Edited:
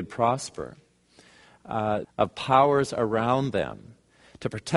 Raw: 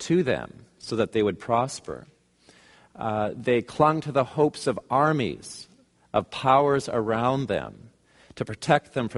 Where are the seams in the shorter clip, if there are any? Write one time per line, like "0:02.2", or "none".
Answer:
0:02.0